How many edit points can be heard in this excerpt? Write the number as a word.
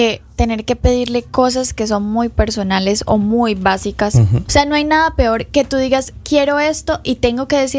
one